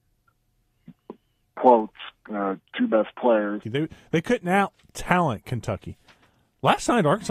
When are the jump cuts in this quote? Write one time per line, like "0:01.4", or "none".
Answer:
0:03.6